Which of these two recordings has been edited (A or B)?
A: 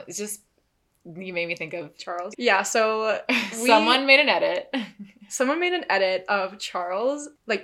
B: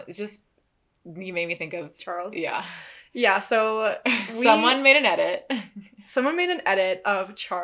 A